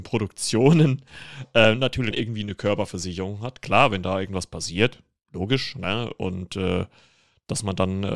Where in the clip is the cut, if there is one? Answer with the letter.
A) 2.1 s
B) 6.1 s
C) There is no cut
A